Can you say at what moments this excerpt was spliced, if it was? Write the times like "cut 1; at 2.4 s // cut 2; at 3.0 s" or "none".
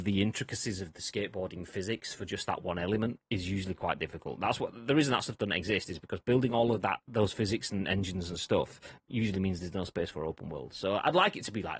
cut 1; at 3.3 s